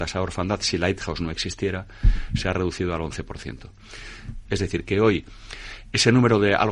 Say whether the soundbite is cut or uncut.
cut